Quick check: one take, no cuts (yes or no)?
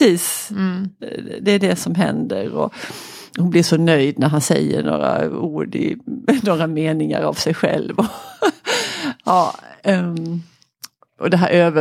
yes